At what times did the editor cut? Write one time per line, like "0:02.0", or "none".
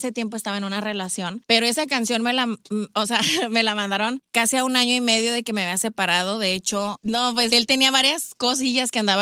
0:07.5